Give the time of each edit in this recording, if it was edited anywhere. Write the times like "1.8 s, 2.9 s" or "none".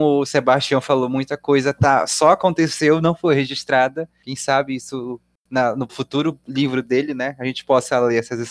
5.9 s